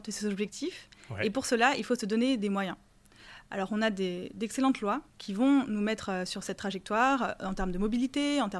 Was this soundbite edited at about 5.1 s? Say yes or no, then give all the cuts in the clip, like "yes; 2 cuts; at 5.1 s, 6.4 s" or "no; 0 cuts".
yes; 1 cut; at 5.1 s